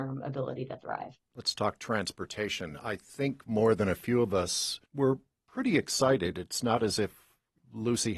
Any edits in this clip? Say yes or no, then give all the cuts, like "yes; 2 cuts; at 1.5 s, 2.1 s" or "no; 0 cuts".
yes; 1 cut; at 4.9 s